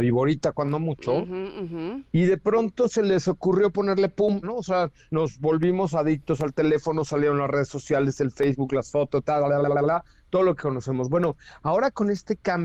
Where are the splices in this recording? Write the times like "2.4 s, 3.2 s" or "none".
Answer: 4.4 s